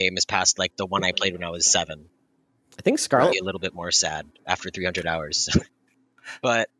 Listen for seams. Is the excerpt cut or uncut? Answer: cut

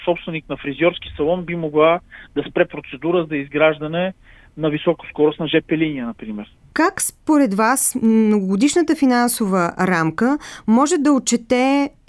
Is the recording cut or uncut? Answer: uncut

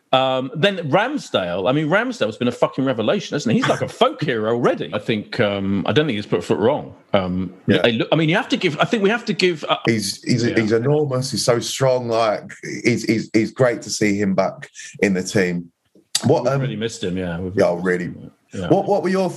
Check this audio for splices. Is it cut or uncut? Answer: cut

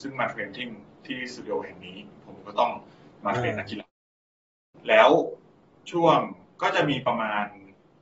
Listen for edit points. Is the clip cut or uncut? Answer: uncut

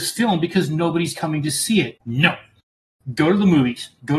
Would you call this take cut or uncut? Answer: cut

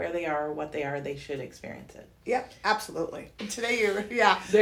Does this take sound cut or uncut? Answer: cut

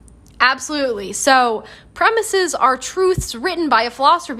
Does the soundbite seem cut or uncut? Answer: uncut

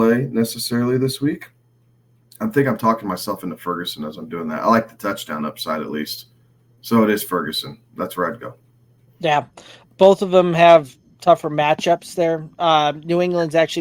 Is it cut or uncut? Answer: cut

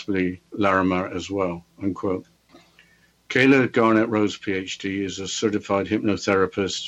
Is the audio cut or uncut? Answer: uncut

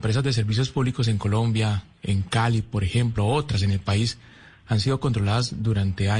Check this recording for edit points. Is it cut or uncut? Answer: uncut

